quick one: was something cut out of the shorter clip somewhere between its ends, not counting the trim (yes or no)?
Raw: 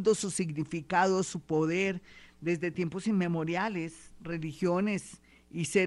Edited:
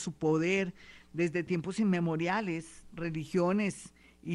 no